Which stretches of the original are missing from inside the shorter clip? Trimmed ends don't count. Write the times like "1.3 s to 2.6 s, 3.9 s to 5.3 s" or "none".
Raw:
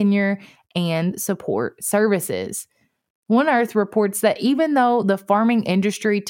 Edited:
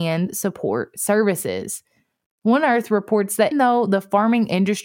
4.4 s to 4.7 s

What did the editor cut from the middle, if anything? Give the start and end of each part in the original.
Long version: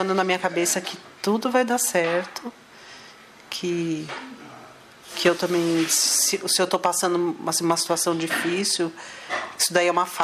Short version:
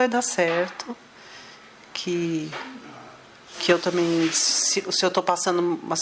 none

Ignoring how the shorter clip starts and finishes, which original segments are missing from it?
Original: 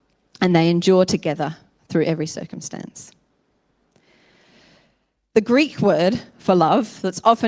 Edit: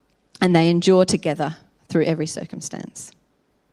none

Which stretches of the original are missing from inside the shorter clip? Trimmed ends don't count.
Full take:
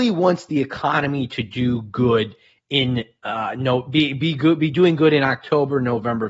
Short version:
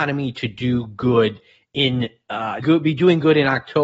3.5 s to 4.4 s

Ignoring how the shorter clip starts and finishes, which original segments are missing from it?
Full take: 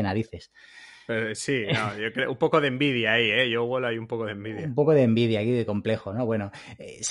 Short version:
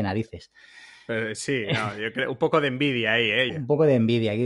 3.5 s to 4.6 s

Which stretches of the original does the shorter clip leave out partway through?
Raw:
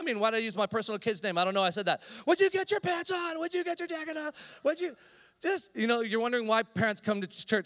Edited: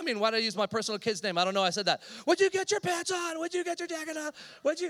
none

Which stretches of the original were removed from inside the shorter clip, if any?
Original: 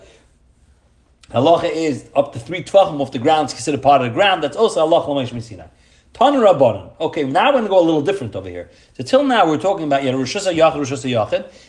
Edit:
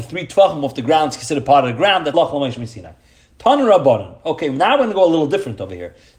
4.5 s to 4.9 s

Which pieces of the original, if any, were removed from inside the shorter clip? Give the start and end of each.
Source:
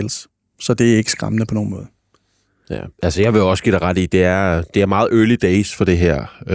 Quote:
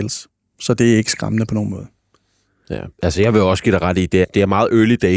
4.2 s to 4.6 s

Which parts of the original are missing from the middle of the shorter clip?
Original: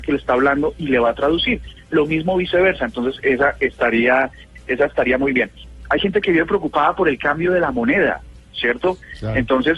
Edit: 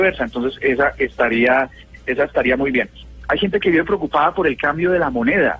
none

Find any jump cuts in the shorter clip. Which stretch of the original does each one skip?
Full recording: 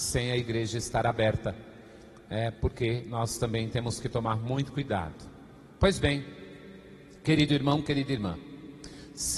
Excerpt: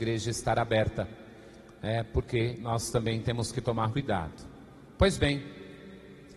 4.4 s to 4.7 s

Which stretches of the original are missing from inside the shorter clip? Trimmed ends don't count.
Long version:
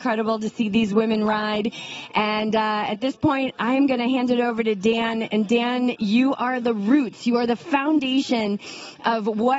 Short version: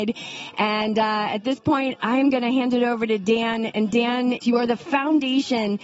6.0 s to 7.2 s

